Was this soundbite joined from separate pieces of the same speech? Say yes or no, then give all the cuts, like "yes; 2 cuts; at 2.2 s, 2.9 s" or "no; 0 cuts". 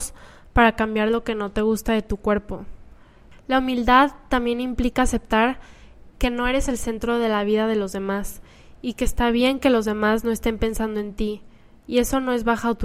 yes; 1 cut; at 3.3 s